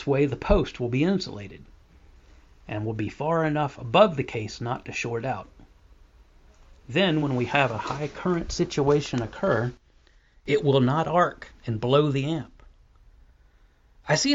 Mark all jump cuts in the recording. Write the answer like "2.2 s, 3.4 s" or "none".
none